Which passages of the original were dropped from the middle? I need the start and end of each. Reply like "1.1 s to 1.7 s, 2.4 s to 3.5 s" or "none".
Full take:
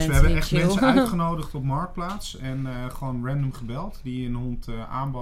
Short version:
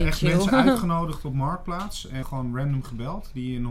2.5 s to 2.9 s